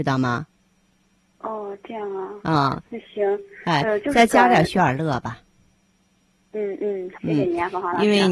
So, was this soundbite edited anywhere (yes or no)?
yes